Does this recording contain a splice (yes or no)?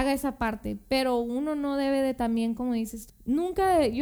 yes